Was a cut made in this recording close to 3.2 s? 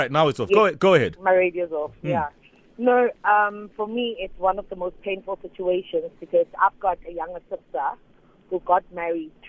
no; 0 cuts

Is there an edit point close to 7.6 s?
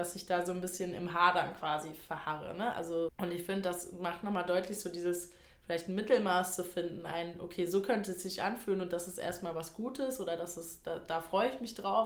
no; 1 cut; at 3.1 s

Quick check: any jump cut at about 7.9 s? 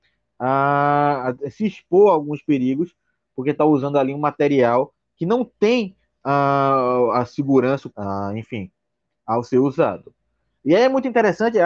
yes; 1 cut; at 7.9 s

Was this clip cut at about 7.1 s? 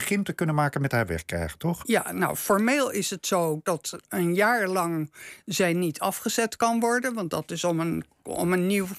no; 0 cuts

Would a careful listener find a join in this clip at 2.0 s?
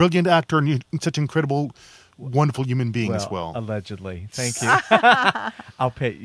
no; 0 cuts

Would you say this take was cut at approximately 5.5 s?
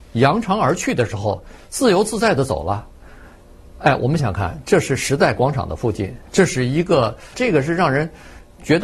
no; 2 cuts; at 4.2 s, 7.3 s

